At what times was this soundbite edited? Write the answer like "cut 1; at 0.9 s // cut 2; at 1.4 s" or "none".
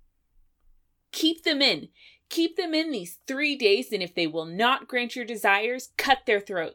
none